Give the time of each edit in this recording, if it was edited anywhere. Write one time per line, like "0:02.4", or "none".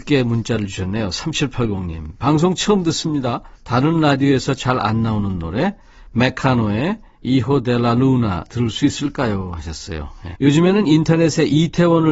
0:03.6
0:10.3